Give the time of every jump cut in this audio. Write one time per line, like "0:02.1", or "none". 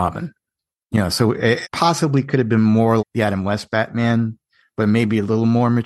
0:01.6
0:03.0